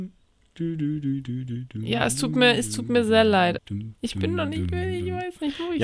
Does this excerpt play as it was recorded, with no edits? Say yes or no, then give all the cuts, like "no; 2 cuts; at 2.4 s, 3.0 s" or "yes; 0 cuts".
no; 1 cut; at 3.6 s